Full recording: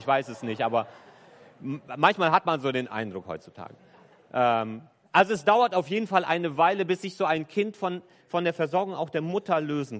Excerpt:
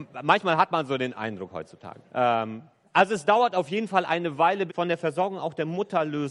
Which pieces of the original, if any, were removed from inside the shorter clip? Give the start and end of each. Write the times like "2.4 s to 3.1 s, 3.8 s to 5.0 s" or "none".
3.8 s to 4.3 s, 6.9 s to 8.2 s